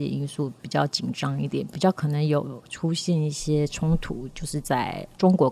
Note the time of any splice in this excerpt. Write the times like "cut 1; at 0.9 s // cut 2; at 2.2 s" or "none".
none